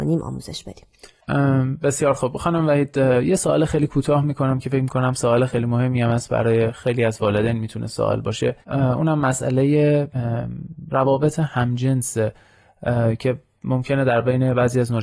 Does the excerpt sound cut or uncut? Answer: cut